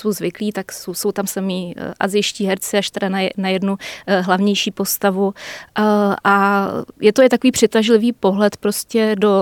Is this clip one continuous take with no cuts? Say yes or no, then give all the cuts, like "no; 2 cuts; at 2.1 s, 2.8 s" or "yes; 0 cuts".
yes; 0 cuts